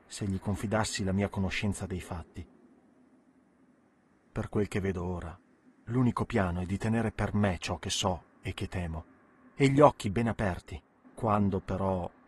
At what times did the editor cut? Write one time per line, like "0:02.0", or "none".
0:11.0